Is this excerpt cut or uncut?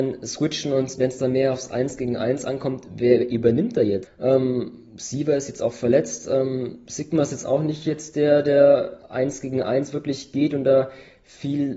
cut